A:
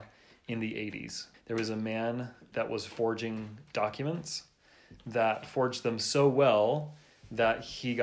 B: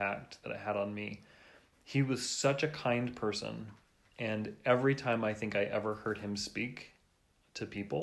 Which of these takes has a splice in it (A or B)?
A